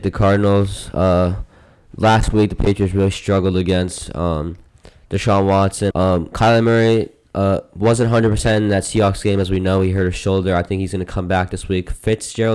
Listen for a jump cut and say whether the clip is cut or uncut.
cut